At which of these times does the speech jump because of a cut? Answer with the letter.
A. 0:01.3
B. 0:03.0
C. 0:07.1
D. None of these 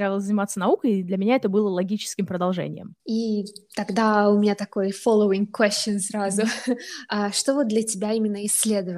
B